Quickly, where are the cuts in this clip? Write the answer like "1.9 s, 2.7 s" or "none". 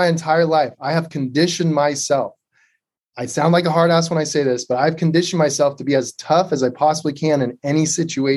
none